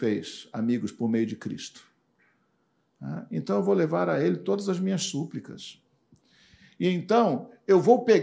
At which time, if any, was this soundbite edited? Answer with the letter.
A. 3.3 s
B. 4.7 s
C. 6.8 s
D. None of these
D